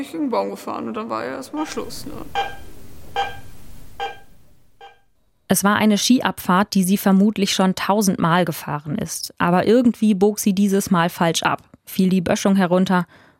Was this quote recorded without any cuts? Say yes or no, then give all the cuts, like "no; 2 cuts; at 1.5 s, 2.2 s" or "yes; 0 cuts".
yes; 0 cuts